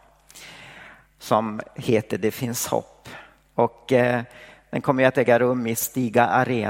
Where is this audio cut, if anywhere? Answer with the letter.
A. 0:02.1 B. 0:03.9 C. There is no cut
C